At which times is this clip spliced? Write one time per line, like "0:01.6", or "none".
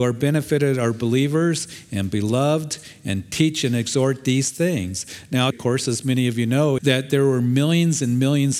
0:05.5
0:06.8